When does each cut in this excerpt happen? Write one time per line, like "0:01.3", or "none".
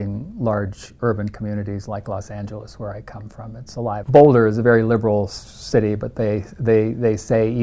0:04.0